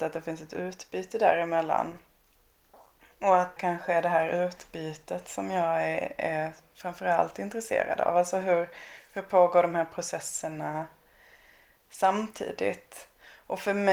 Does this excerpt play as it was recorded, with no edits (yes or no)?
no